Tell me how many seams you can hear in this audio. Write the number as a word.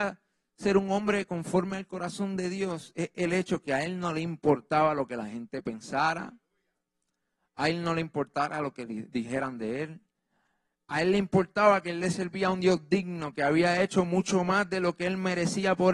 zero